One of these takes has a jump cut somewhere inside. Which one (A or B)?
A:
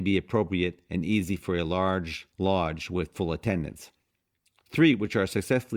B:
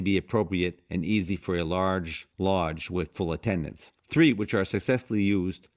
B